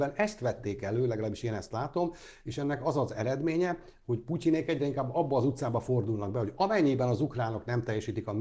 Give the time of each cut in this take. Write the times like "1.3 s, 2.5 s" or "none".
none